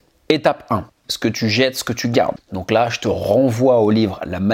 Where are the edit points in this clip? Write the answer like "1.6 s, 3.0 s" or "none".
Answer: 1.0 s, 2.4 s

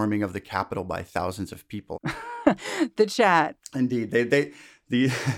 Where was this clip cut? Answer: 1.9 s

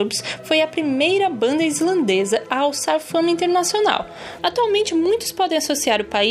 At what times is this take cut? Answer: 4.4 s

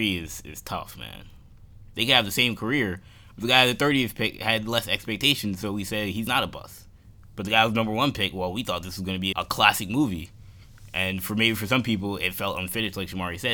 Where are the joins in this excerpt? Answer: 1.9 s, 9.3 s

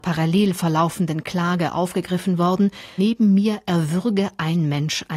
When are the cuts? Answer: 3.0 s

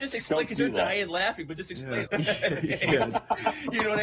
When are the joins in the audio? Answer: 2.1 s

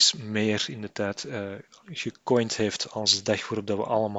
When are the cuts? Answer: none

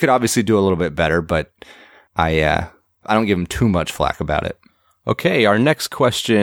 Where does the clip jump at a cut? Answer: 3.0 s

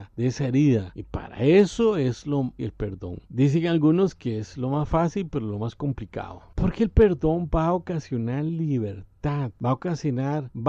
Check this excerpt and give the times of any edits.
2.6 s

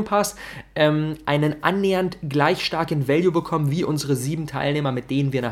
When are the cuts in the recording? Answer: none

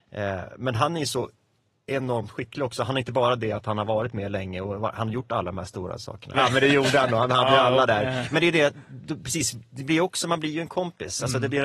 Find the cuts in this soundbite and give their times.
6.3 s

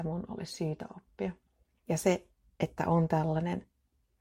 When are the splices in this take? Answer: 1.8 s

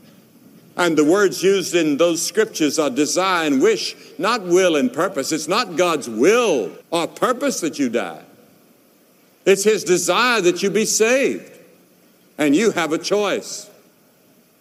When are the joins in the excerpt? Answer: 6.8 s

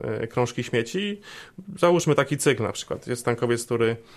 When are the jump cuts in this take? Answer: none

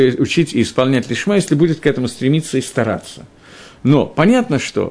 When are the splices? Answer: none

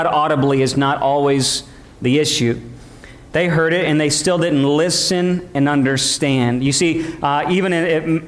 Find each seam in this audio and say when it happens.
3.3 s

